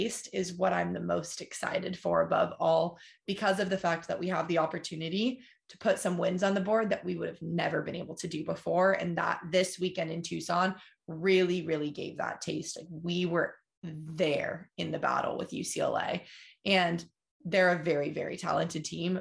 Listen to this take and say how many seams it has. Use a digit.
0